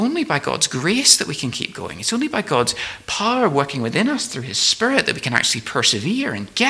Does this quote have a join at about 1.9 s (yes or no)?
no